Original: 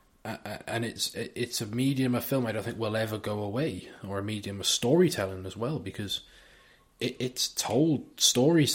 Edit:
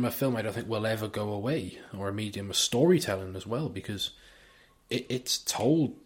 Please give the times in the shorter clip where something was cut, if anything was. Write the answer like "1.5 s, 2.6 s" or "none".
none